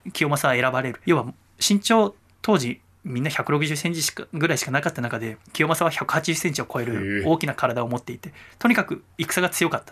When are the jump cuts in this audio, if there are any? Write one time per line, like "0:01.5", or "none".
0:01.0
0:05.4